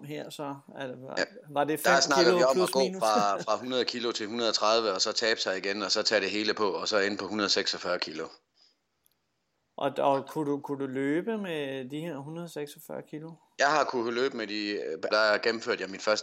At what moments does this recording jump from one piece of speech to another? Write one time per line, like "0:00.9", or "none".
0:15.1